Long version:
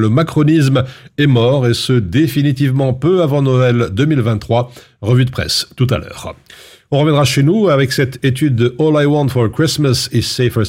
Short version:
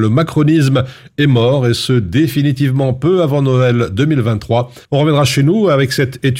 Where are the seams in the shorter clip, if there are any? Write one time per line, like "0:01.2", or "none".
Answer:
0:04.9

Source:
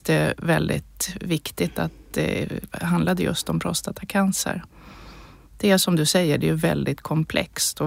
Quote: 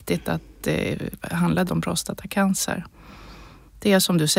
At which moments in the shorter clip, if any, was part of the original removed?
0:01.7

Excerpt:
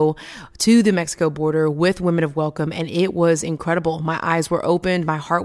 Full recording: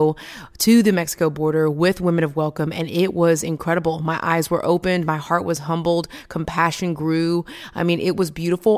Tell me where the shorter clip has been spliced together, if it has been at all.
none

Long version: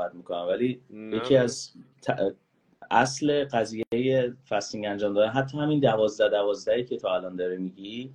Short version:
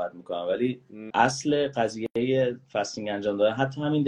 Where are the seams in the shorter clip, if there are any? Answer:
0:01.1

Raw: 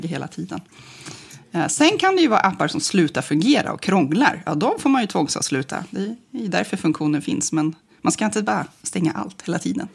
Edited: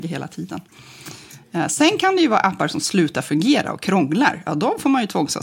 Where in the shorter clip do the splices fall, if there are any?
none

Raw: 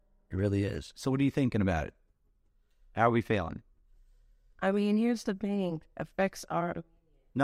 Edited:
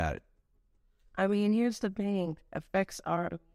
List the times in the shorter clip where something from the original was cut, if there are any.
0:01.0

